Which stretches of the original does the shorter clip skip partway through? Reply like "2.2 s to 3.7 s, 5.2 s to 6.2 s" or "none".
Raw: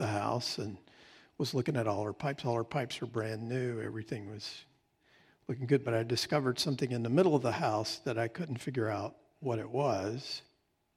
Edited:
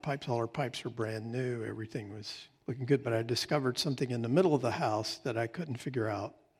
4.7 s to 5.4 s